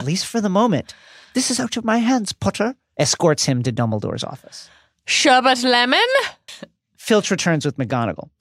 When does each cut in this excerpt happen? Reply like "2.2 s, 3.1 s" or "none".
2.9 s, 6.5 s